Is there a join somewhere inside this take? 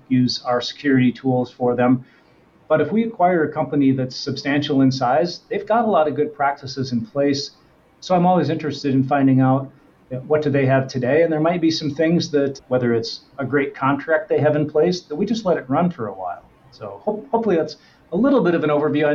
no; 0 cuts

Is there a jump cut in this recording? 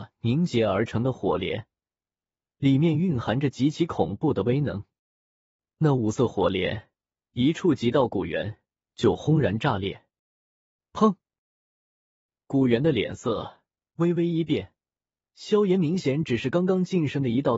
no; 0 cuts

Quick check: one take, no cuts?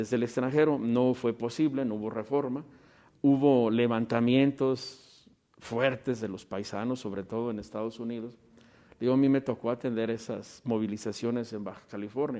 yes; 0 cuts

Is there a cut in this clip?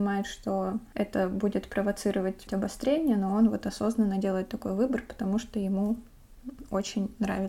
yes; 1 cut; at 2.5 s

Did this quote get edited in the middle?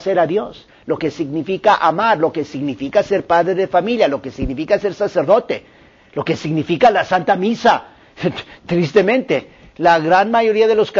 no; 0 cuts

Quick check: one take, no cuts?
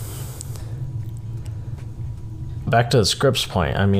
no; 1 cut; at 2.7 s

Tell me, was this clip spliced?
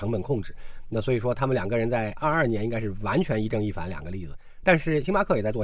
no; 0 cuts

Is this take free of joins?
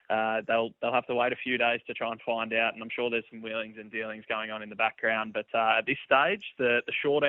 yes; 0 cuts

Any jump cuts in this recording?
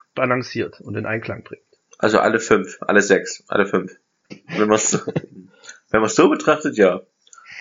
yes; 1 cut; at 4.3 s

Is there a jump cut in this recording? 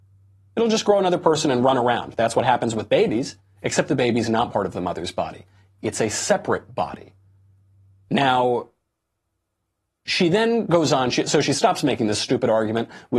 yes; 1 cut; at 3.4 s

